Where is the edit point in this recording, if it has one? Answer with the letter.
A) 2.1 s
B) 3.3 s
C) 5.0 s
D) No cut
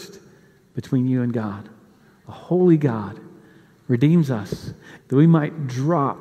C